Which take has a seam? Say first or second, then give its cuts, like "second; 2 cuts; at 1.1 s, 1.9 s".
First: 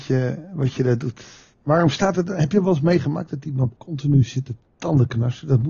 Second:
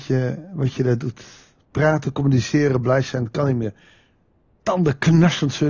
first; 2 cuts; at 1.5 s, 3.8 s